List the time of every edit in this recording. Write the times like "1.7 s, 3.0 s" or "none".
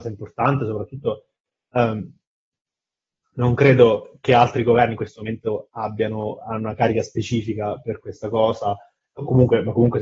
none